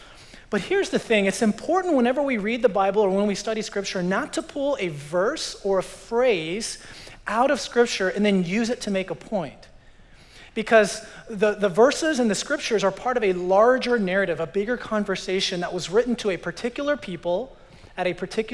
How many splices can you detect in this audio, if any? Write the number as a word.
zero